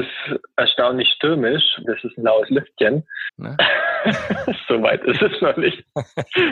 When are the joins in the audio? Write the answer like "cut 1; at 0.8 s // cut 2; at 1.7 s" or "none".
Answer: cut 1; at 1.8 s // cut 2; at 3.3 s